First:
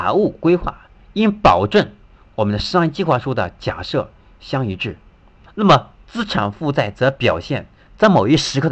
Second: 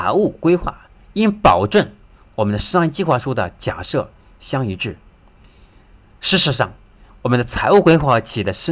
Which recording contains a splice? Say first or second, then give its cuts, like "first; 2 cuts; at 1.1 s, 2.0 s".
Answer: first; 1 cut; at 5.5 s